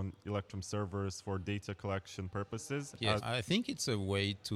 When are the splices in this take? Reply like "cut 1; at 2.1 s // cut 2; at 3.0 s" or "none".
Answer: cut 1; at 3.2 s